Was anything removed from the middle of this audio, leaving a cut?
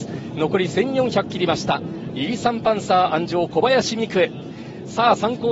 yes; 1 cut; at 2.1 s

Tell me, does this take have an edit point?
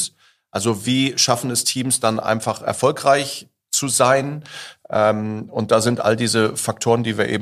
no; 0 cuts

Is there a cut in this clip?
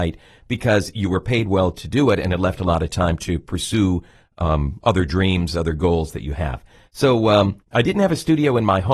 no; 0 cuts

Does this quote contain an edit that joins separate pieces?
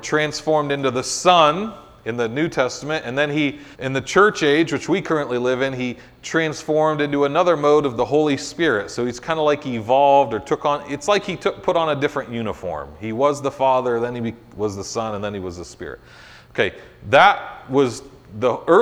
yes; 1 cut; at 3.7 s

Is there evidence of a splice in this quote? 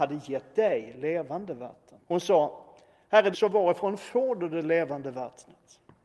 yes; 2 cuts; at 2.0 s, 3.3 s

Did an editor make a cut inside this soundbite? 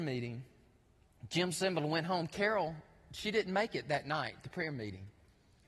no; 0 cuts

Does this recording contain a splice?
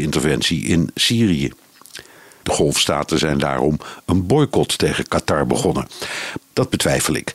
yes; 2 cuts; at 2.4 s, 6.4 s

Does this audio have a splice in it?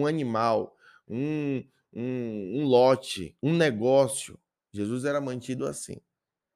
yes; 1 cut; at 3.4 s

